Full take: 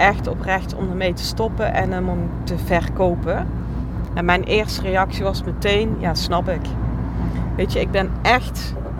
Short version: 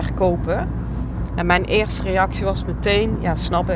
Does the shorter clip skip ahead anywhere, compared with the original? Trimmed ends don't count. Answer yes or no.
no